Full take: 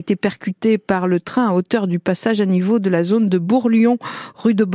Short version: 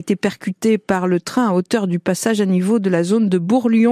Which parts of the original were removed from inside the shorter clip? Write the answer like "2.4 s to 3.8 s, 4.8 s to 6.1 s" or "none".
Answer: none